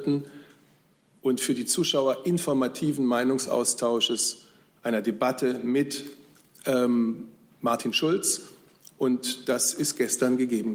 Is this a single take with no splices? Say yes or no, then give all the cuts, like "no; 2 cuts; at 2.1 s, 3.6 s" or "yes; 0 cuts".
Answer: yes; 0 cuts